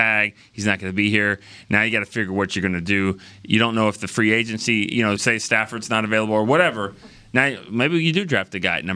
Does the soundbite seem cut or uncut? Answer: cut